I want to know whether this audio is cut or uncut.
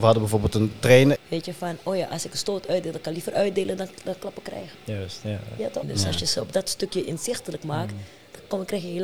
cut